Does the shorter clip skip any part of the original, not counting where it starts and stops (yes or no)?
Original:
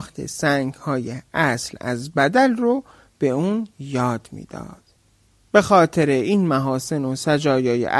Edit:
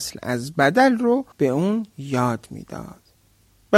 yes